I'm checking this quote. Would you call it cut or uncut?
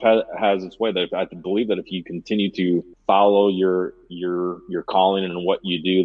cut